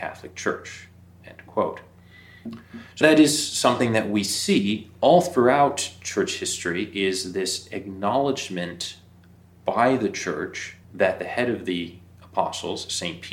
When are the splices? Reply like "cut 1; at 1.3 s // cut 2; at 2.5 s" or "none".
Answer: cut 1; at 3.0 s // cut 2; at 10.8 s

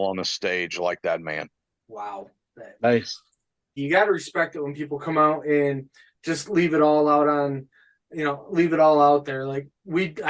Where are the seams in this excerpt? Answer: cut 1; at 1.7 s // cut 2; at 3.8 s

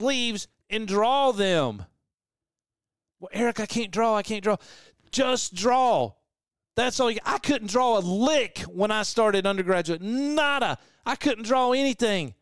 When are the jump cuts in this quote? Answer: cut 1; at 3.1 s

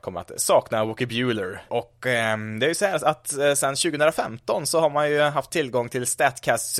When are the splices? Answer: cut 1; at 1.7 s

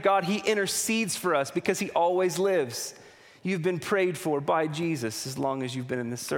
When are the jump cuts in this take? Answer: none

